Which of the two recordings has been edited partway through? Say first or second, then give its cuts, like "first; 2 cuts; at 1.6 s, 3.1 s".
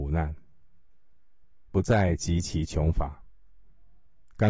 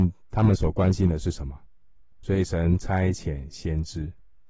second; 1 cut; at 2.1 s